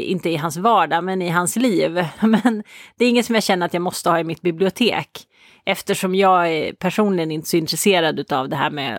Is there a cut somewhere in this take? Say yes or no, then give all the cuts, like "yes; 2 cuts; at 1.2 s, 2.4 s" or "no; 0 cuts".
yes; 1 cut; at 2.2 s